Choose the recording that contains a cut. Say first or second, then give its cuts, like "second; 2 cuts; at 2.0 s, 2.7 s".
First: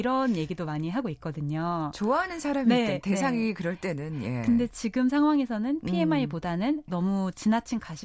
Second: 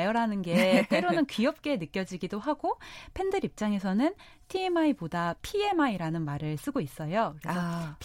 first; 1 cut; at 6.9 s